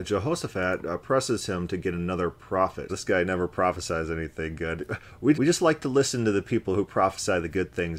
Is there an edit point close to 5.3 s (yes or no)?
yes